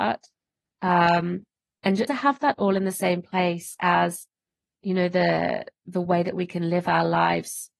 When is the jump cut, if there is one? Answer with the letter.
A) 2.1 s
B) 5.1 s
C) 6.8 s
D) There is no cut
A